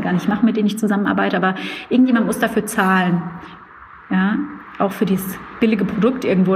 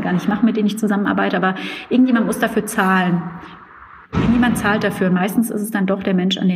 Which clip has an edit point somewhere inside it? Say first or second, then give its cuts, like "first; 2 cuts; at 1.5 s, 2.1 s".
second; 1 cut; at 4.0 s